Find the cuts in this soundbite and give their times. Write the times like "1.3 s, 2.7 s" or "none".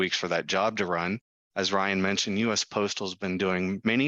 1.4 s